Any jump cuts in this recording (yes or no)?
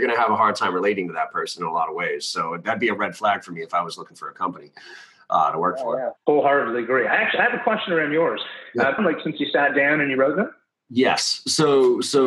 yes